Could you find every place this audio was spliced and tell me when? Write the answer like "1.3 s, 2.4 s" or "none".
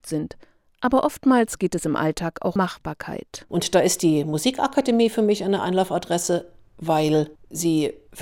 2.6 s